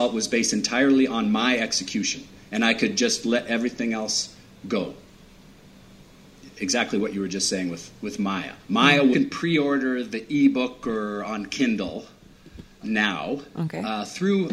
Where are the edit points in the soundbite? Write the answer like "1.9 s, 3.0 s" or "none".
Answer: 9.1 s, 12.8 s